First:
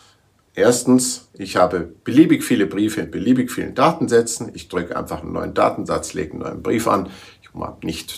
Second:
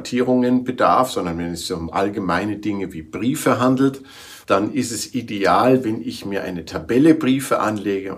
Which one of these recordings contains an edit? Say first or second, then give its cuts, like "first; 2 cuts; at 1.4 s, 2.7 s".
second; 1 cut; at 4.4 s